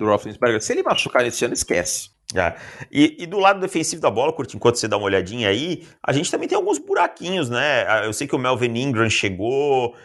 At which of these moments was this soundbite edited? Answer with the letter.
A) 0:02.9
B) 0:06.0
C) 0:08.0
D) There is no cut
D